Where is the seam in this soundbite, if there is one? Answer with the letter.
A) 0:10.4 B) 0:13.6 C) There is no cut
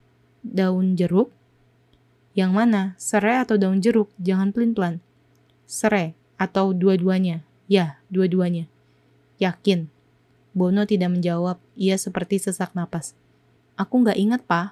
B